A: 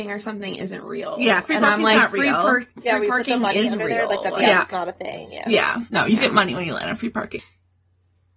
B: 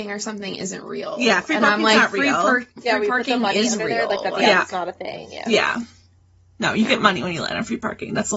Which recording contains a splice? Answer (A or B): A